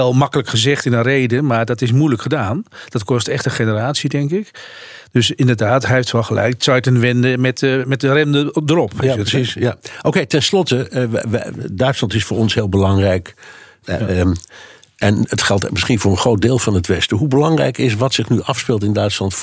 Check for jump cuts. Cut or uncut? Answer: cut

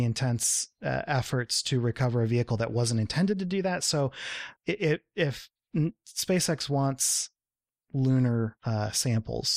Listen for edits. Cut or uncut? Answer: cut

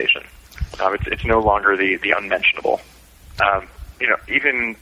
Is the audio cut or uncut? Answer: cut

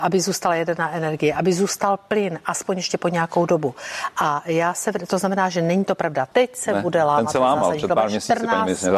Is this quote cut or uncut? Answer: cut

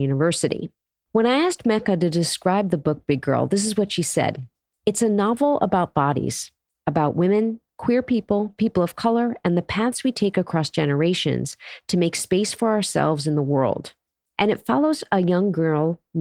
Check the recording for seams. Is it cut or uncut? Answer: cut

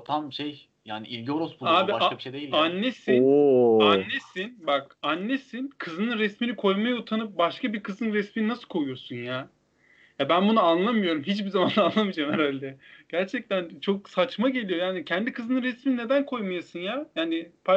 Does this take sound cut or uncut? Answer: uncut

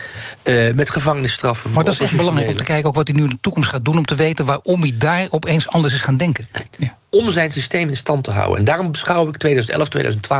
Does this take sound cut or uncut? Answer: cut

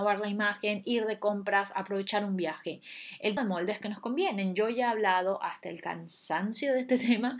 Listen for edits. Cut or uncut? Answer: cut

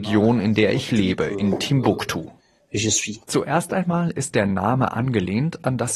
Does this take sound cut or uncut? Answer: cut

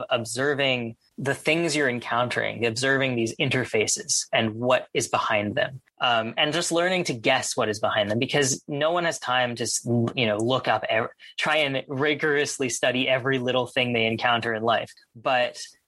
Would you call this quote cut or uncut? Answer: uncut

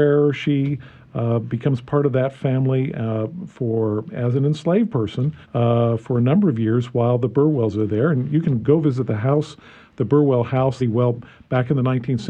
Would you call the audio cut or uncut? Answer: cut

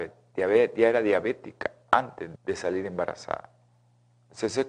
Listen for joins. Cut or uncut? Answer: cut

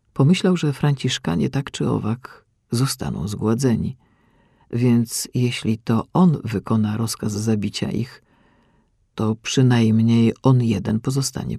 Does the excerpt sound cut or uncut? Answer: uncut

